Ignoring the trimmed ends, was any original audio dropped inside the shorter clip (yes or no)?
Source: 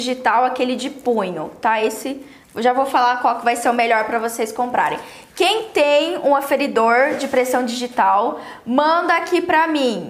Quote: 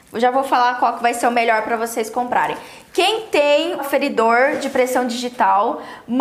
yes